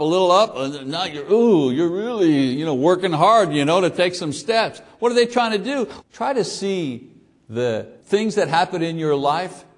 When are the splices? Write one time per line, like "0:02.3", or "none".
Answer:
0:06.0
0:08.0